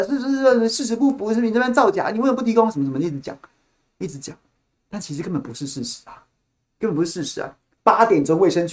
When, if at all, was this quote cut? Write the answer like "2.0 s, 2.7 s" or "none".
7.8 s